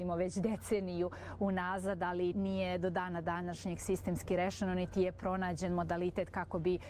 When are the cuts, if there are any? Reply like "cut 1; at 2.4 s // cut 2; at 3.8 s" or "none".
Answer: cut 1; at 2.3 s

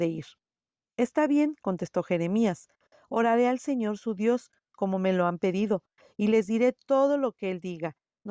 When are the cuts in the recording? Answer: none

